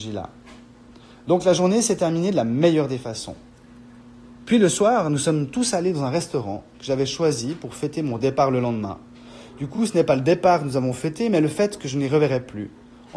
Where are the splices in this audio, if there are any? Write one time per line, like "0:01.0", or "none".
none